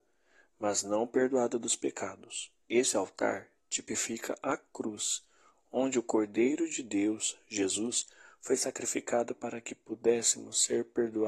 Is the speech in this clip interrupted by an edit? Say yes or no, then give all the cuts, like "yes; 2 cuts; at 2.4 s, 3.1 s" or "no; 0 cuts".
yes; 1 cut; at 2.6 s